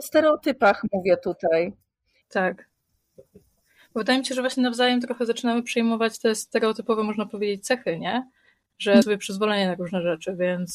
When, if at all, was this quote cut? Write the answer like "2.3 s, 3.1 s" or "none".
2.2 s, 9.0 s